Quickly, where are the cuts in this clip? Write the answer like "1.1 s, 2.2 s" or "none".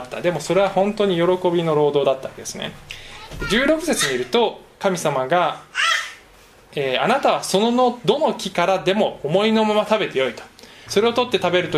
10.9 s